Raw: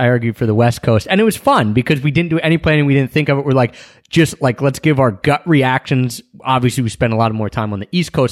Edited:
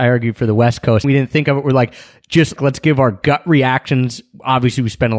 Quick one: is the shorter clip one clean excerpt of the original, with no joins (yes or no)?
no